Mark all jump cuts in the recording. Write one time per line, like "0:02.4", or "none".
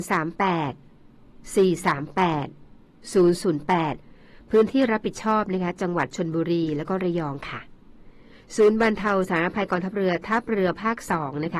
none

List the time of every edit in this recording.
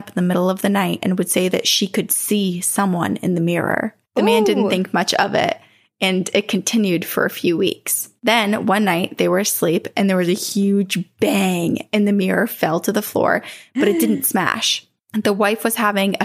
0:08.2

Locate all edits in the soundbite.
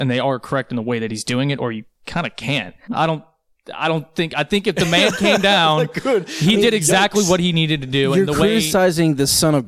0:02.9

